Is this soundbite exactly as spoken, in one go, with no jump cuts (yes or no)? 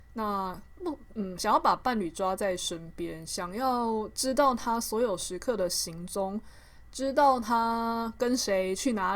yes